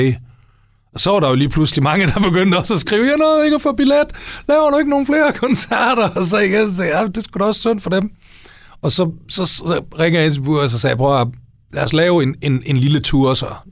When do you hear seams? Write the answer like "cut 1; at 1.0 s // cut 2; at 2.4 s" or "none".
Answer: none